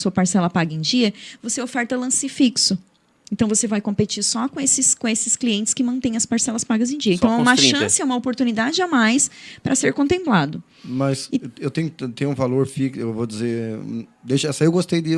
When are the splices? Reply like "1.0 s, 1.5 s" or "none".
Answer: none